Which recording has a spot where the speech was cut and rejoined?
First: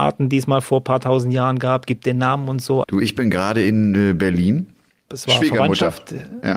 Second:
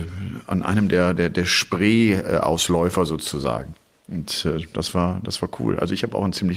first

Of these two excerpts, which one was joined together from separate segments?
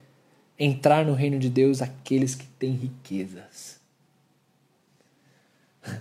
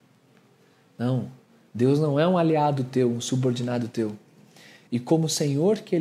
second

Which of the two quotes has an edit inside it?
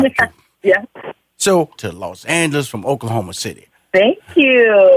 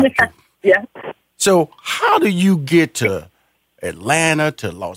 first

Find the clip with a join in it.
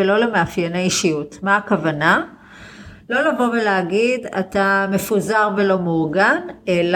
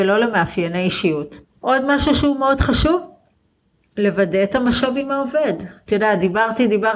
second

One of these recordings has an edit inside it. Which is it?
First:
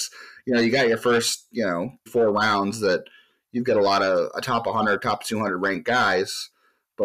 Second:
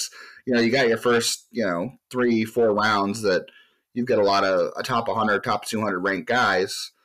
first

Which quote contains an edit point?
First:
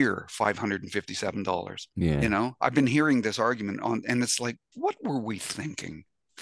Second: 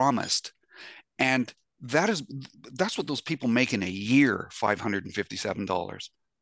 first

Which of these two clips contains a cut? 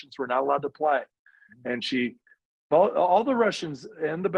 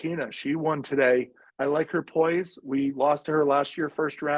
second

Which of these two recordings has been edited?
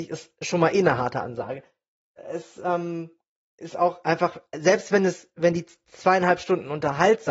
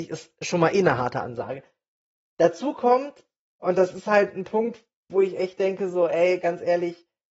first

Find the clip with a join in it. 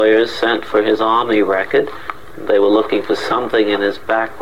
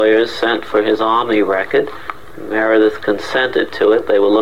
first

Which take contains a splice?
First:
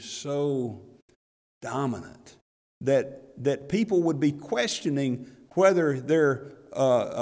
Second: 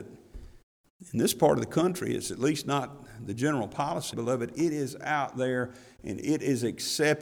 second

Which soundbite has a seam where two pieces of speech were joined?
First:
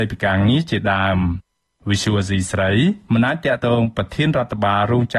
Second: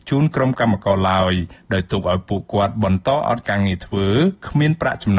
first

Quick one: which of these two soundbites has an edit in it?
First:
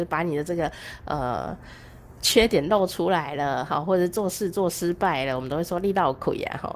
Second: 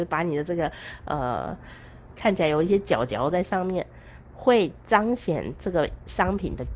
second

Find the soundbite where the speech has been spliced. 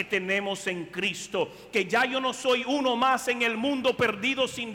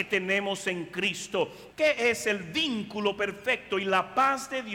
second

